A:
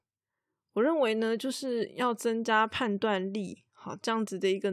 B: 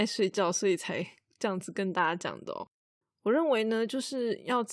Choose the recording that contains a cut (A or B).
B